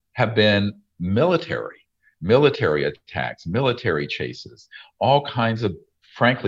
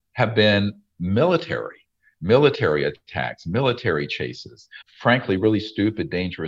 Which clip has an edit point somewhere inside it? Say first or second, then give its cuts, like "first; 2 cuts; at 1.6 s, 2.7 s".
second; 1 cut; at 4.8 s